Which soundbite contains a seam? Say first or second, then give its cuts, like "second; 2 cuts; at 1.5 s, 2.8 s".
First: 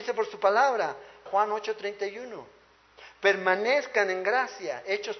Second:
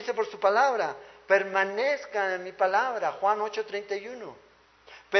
first; 1 cut; at 1.3 s